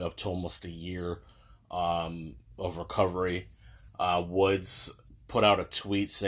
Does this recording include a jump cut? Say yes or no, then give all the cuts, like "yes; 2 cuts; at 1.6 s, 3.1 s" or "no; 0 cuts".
yes; 1 cut; at 2.5 s